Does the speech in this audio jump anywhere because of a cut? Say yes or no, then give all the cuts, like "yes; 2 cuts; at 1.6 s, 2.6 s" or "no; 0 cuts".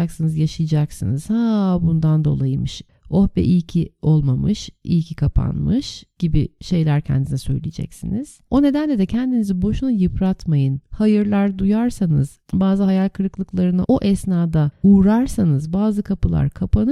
no; 0 cuts